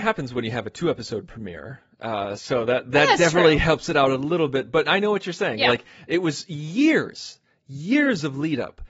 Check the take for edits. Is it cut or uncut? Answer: uncut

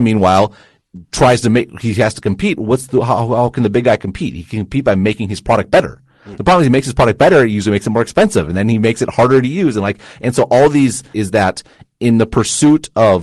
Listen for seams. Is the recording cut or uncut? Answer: cut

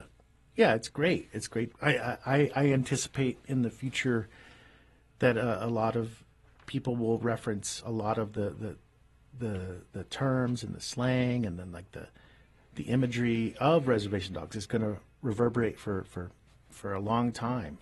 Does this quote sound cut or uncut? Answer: cut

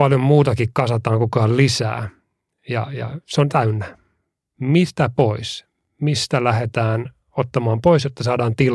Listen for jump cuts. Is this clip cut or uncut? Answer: uncut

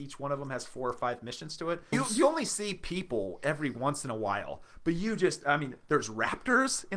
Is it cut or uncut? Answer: cut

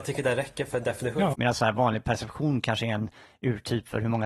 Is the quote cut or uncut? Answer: cut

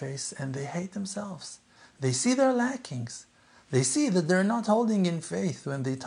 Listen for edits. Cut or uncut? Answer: uncut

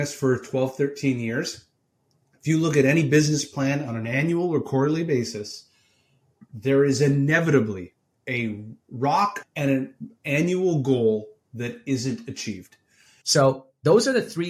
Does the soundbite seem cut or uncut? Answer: cut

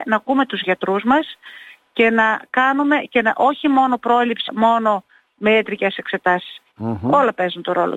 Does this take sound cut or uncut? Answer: cut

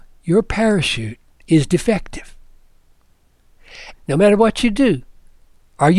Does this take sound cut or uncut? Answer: cut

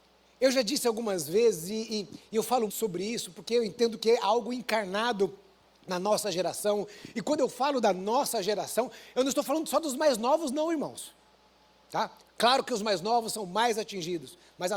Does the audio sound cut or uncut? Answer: cut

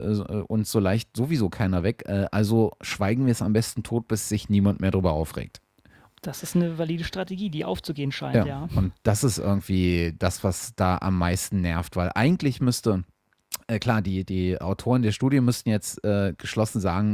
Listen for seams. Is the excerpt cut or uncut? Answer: uncut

